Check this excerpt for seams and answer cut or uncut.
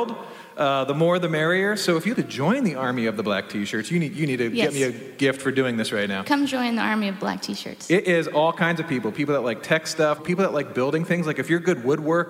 cut